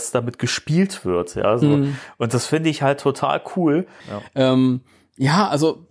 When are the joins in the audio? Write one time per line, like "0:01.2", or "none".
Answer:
0:04.0

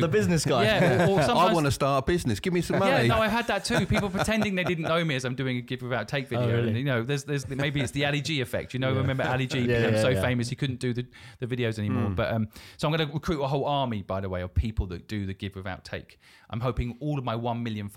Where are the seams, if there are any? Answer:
0:07.4

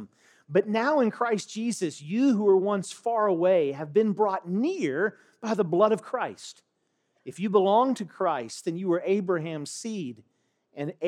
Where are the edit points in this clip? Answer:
0:07.1

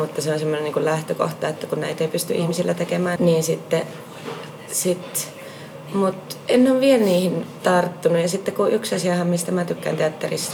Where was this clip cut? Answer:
0:03.2

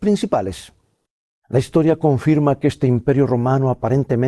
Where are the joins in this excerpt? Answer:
0:01.4

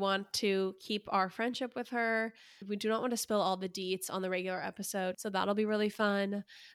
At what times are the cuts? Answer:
0:05.1

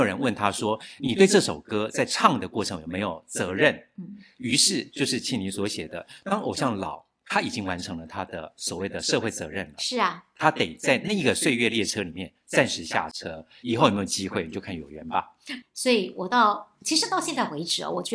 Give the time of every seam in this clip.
0:15.6

